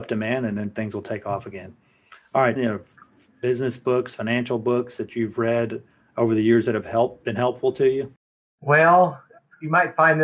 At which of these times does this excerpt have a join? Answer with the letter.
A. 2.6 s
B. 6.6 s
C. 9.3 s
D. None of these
A